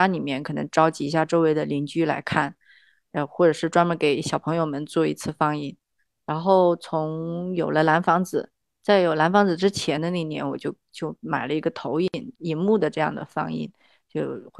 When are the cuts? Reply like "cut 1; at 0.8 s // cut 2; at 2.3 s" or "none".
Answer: cut 1; at 12.3 s